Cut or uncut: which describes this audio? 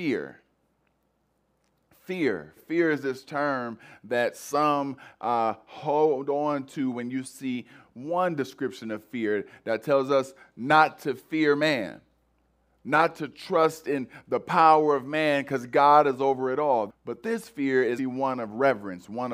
cut